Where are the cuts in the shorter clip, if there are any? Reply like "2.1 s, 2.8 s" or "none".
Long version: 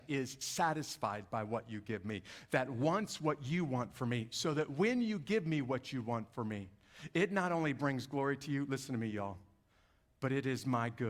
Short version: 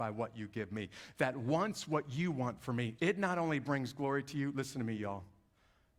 3.0 s